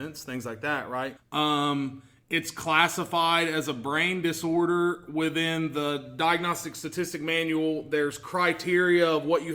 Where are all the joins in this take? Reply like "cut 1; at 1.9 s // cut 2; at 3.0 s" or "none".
cut 1; at 1.2 s